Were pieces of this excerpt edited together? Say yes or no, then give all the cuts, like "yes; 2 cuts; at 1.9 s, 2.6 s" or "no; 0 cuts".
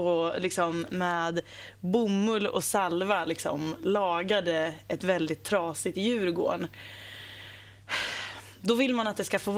no; 0 cuts